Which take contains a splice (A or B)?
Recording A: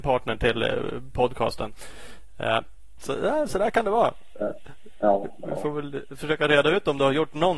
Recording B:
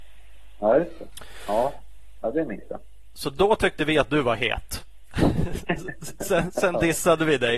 A